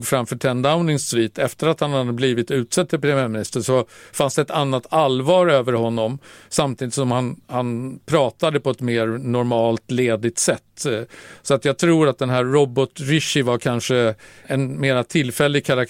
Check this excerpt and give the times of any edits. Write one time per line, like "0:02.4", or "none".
0:14.4